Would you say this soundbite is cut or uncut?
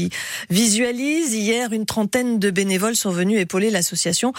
uncut